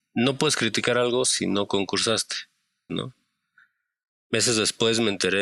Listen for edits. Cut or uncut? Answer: cut